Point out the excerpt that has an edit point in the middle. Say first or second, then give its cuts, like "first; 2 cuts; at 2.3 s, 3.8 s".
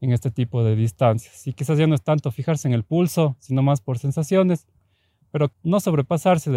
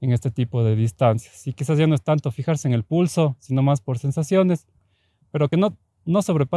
first; 1 cut; at 5.5 s